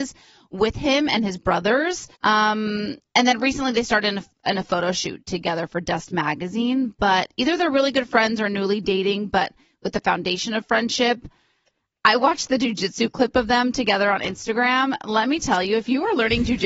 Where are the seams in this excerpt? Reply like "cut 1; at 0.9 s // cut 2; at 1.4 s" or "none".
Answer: cut 1; at 2.2 s